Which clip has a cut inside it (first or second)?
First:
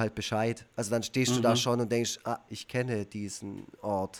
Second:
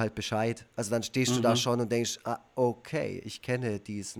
first